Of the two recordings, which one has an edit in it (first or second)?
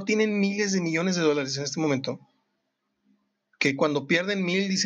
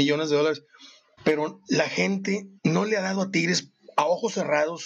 second